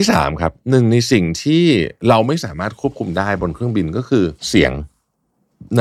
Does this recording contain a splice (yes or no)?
yes